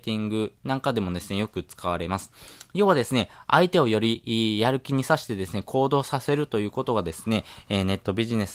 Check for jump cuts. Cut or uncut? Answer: uncut